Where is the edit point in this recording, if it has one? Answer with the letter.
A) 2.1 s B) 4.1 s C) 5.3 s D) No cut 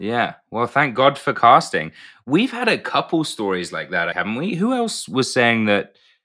B